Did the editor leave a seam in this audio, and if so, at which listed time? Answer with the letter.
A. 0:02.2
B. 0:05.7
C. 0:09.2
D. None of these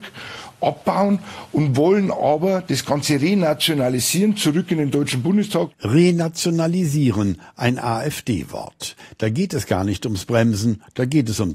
D